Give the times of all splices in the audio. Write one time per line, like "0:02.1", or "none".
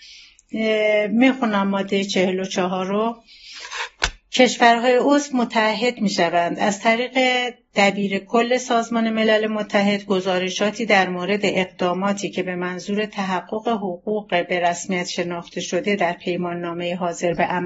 none